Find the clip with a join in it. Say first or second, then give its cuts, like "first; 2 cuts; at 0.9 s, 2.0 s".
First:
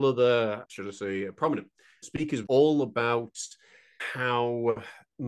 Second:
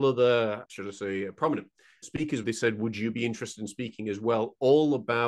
first; 1 cut; at 2.5 s